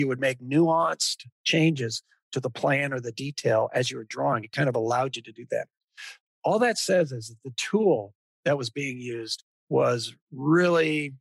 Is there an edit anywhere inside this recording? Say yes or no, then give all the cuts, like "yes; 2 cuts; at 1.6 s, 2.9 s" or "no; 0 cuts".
no; 0 cuts